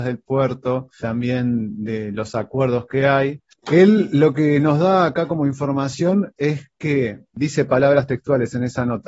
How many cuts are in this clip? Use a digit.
1